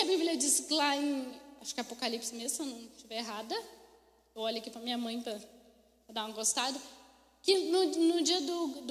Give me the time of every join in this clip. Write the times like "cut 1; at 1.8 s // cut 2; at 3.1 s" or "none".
none